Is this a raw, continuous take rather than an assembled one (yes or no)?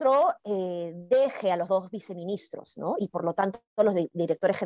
yes